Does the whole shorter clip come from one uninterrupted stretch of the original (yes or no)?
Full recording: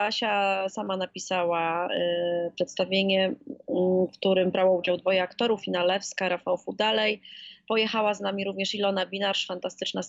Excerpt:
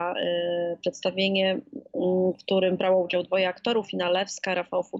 yes